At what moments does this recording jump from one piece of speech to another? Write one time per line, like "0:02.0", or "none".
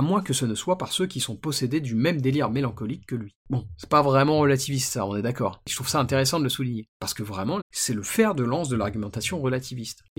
0:03.4
0:07.6

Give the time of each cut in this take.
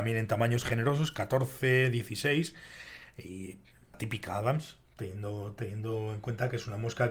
0:03.9

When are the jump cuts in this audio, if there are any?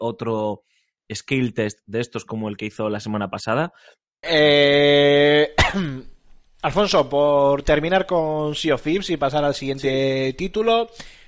0:04.2

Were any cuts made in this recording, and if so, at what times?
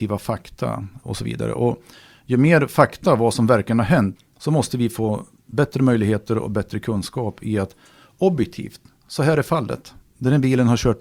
0:01.0
0:04.2

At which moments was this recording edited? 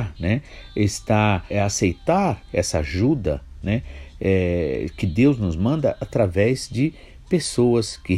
0:01.5

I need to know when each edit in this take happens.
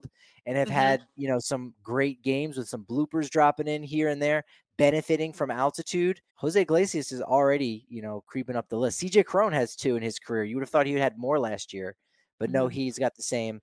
0:06.3

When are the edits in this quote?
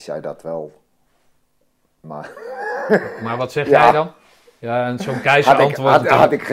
none

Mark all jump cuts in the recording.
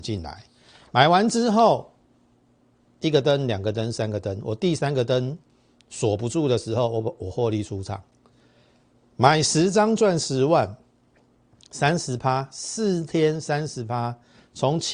none

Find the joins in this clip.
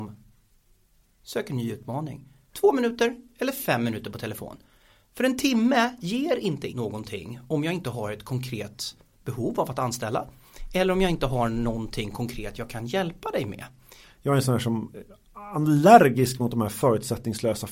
0:02.5
0:06.7
0:14.0

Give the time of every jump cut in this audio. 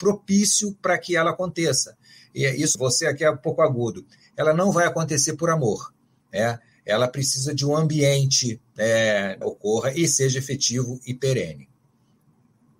0:02.7
0:09.4

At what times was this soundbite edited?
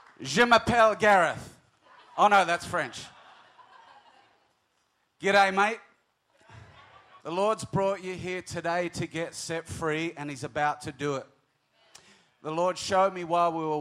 0:07.2

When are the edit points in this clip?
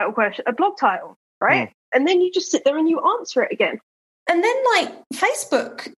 none

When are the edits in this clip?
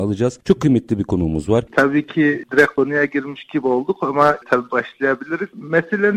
0:01.7

